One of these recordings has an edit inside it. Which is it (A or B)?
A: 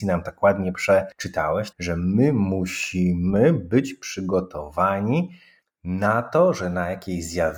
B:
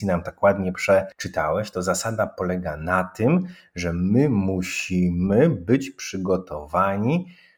A